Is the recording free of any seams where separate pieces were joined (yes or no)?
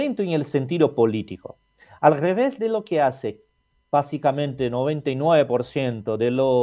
yes